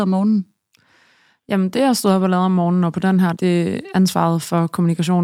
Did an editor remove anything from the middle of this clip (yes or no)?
yes